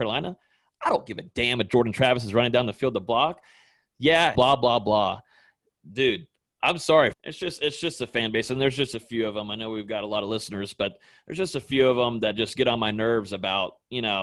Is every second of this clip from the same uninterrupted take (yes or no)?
no